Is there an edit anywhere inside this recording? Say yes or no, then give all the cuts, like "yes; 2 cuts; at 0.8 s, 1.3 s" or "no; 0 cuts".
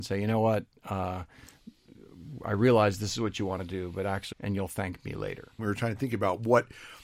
yes; 2 cuts; at 4.3 s, 5.6 s